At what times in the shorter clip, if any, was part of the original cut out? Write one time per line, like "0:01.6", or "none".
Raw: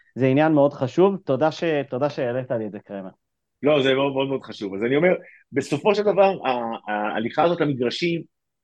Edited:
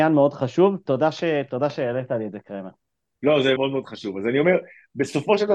0:03.6